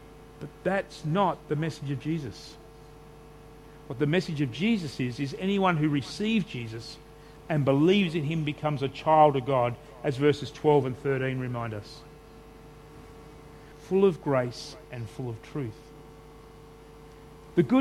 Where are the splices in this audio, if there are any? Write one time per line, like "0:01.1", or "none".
0:13.7

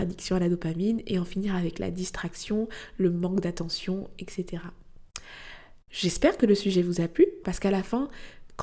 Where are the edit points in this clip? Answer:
0:07.4

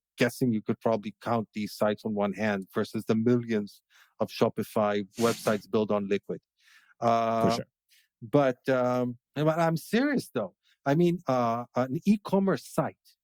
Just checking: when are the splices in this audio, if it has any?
0:09.2
0:11.2

